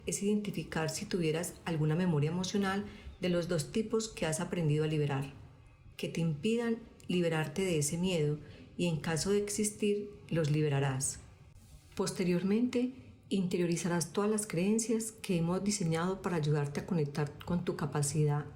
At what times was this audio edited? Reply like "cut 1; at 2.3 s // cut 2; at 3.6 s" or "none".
cut 1; at 5.9 s